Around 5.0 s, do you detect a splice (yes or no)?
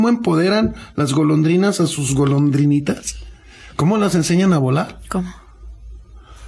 no